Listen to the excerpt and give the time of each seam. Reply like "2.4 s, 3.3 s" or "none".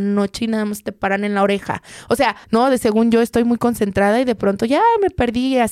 2.4 s

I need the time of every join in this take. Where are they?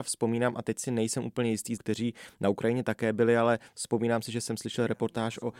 1.8 s

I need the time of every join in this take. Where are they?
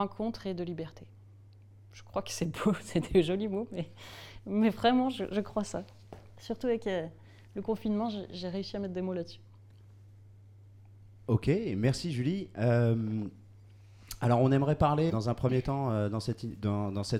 15.1 s

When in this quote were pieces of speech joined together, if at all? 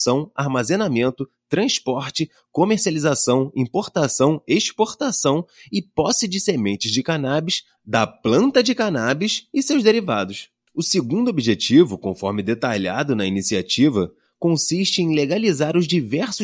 none

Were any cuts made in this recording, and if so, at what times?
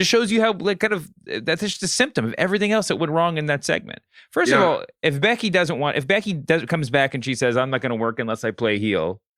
none

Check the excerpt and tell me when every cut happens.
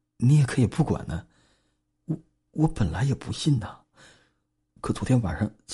1.9 s

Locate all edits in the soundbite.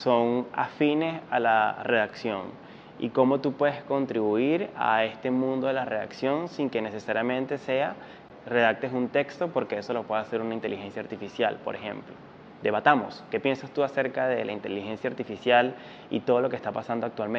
12.5 s

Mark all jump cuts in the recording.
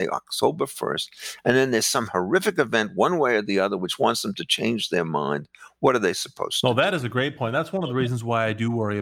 none

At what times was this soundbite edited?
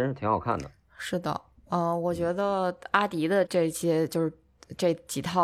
3.5 s

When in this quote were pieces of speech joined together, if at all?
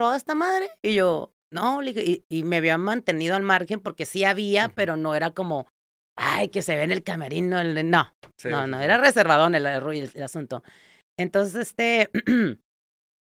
none

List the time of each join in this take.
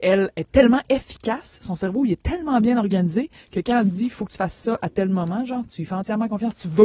none

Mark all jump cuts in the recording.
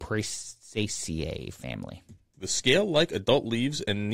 2.3 s

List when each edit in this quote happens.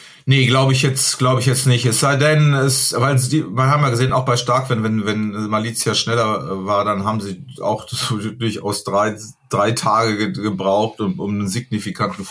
none

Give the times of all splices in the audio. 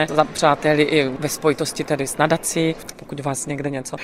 2.9 s

